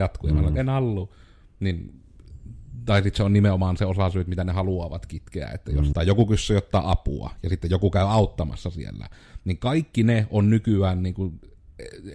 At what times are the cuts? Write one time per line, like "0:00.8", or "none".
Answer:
0:05.9